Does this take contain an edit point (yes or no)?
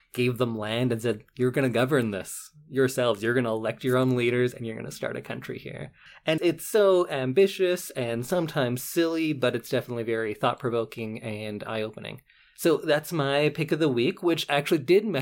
yes